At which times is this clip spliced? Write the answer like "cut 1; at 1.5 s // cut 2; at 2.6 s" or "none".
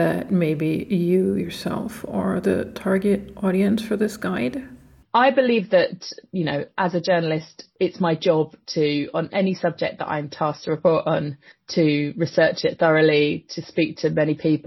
cut 1; at 5.1 s